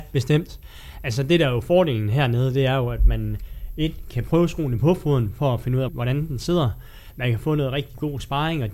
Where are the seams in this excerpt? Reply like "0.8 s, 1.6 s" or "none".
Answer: 5.9 s

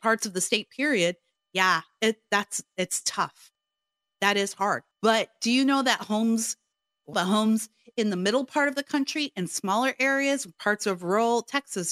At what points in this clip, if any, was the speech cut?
4.9 s, 7.1 s

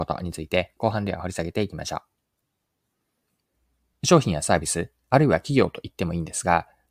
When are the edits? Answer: 3.9 s

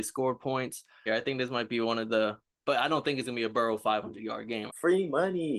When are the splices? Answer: 1.1 s, 4.7 s

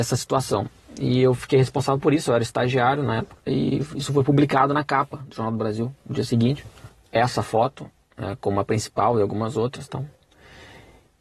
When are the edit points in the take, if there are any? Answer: 3.5 s

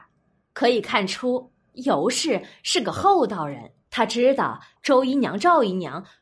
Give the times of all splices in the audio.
3.8 s

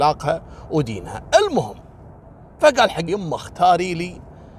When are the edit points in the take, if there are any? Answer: 3.1 s

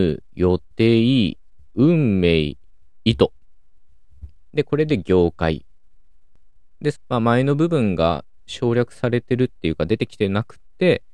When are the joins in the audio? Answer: 3.0 s, 6.9 s

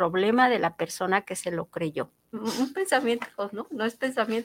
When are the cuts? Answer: 2.3 s

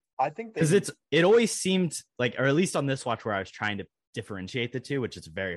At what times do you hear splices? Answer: none

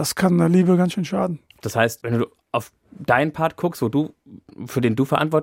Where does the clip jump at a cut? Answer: none

